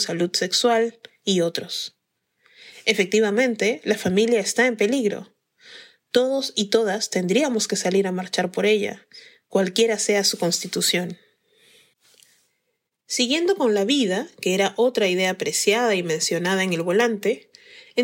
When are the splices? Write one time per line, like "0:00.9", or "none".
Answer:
none